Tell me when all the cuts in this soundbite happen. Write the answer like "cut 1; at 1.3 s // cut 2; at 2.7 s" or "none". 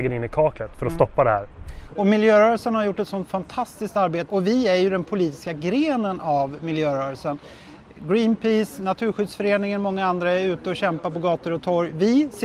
cut 1; at 4.3 s